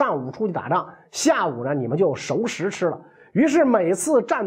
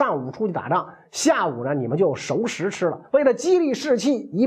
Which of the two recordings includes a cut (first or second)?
second